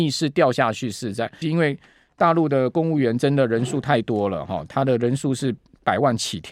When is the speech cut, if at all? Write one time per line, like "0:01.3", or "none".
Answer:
0:01.4